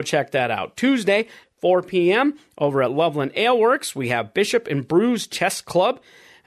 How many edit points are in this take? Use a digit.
1